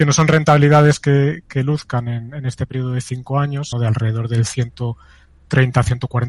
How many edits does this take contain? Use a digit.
1